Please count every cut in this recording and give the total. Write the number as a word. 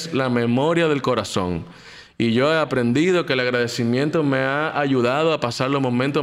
zero